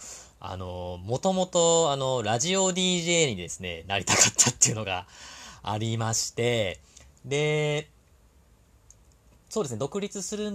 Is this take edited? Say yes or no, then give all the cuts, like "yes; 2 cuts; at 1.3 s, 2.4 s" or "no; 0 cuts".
no; 0 cuts